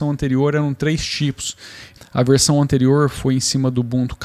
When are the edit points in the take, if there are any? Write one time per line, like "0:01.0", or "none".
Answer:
0:02.0